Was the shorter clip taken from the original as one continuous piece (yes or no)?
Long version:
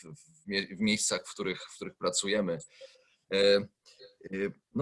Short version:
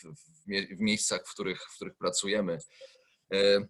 yes